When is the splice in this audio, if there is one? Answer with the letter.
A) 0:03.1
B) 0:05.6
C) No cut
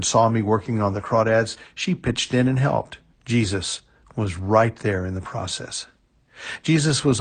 A